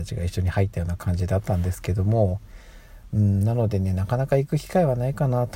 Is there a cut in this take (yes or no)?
no